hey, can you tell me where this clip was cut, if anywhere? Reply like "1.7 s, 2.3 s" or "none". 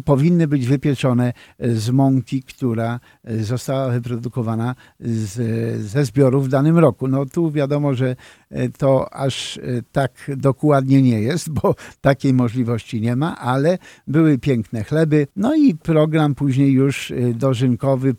15.3 s